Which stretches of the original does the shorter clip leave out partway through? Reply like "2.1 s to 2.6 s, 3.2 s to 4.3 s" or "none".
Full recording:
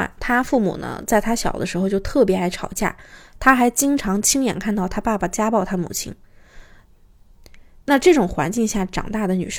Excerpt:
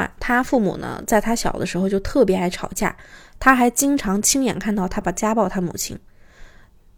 5.0 s to 5.2 s

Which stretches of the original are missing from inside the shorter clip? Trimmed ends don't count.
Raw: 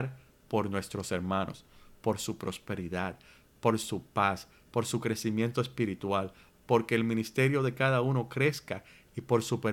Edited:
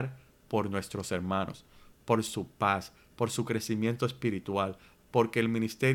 1.9 s to 3.5 s

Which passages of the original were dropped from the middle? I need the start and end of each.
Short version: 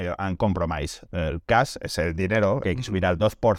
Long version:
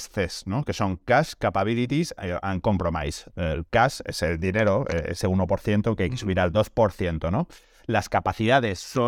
4.9 s to 6.0 s

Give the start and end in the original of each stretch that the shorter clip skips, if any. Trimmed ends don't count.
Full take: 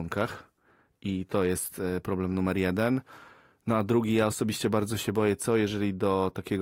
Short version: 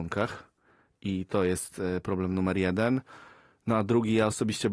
none

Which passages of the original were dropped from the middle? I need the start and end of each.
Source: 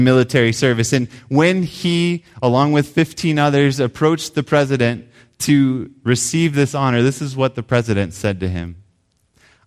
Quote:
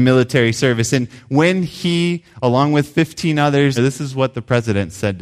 3.8 s to 7.0 s

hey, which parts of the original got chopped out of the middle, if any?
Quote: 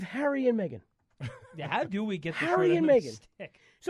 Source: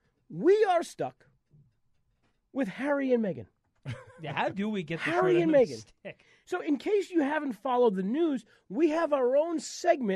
none

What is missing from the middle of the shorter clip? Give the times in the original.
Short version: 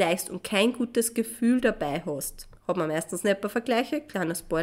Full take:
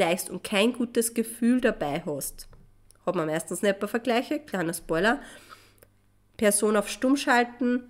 2.6 s to 2.9 s

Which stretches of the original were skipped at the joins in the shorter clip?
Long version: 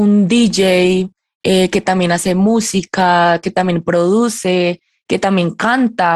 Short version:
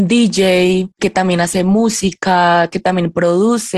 1.2 s to 1.7 s

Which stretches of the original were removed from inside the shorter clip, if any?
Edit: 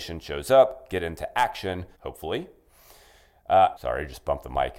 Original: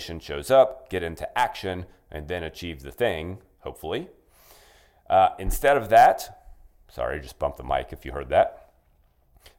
2.0 s to 3.6 s, 5.4 s to 6.9 s

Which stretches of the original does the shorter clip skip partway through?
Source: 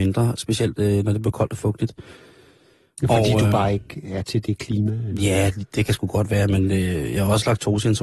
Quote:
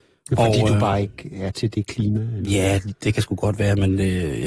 none

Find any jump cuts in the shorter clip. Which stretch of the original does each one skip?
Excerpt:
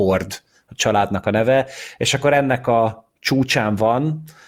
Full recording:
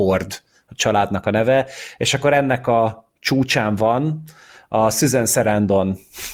none

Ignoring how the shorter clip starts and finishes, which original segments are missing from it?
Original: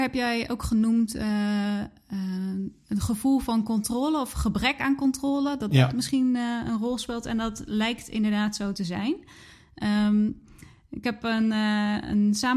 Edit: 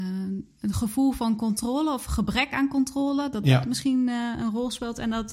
none

